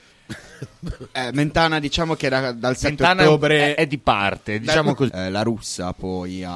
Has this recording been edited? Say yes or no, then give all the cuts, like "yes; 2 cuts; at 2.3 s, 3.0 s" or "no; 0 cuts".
yes; 1 cut; at 5.1 s